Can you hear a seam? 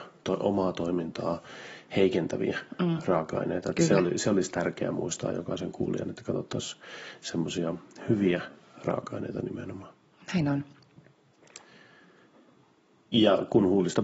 no; 0 cuts

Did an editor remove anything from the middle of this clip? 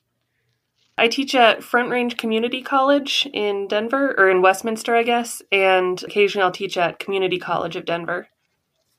no; 0 cuts

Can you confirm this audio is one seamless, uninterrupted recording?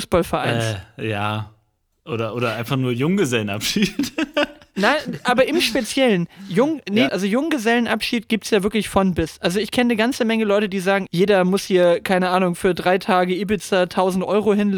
no; 2 cuts; at 7.1 s, 11.1 s

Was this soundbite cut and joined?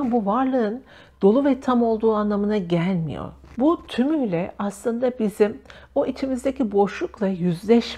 yes; 1 cut; at 3.5 s

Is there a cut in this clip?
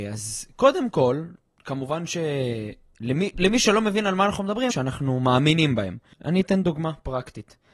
yes; 2 cuts; at 4.7 s, 6.1 s

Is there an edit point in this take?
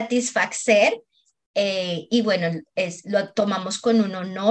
yes; 1 cut; at 3.0 s

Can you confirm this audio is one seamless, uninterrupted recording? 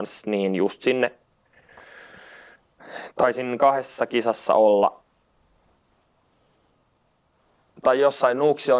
yes; 0 cuts

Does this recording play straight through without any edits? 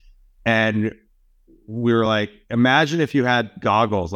yes; 0 cuts

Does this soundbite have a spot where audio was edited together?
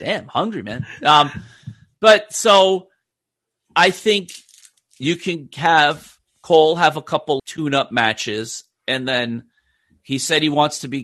yes; 1 cut; at 7.4 s

